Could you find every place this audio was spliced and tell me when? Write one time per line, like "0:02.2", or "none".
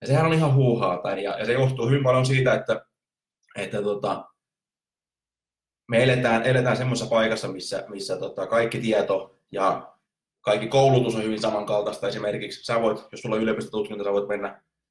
0:01.1